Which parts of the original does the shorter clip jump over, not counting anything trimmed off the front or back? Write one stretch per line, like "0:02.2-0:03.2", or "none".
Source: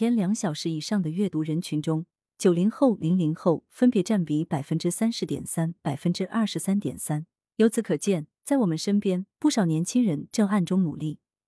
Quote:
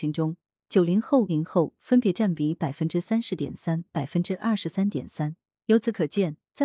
0:03.0-0:03.2